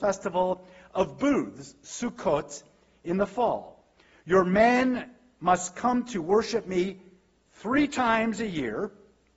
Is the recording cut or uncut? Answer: uncut